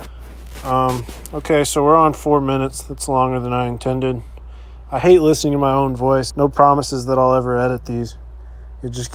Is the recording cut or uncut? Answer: cut